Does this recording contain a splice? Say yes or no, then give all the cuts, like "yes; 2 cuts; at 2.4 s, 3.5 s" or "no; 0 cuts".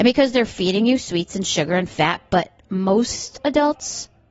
no; 0 cuts